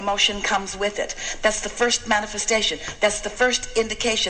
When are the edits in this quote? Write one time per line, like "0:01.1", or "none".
none